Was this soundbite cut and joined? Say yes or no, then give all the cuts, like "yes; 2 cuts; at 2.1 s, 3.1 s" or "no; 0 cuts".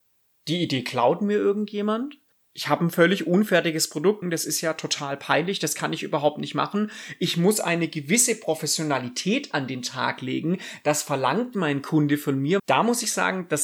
yes; 2 cuts; at 4.2 s, 12.6 s